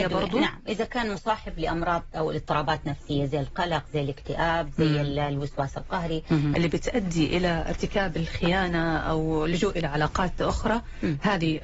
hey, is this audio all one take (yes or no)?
no